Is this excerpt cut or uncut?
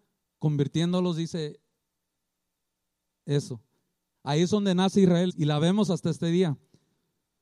cut